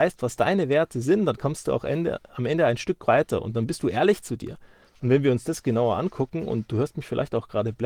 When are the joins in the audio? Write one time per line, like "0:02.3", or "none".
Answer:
0:04.9